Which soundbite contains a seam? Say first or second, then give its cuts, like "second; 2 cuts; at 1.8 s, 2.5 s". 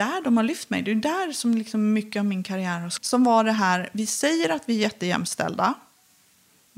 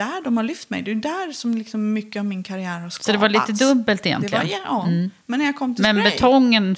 first; 1 cut; at 3.0 s